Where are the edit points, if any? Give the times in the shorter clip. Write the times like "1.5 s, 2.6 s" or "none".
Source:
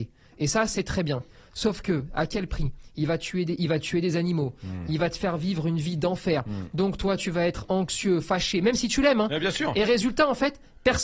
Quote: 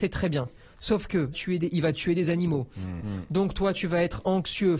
1.3 s, 3.0 s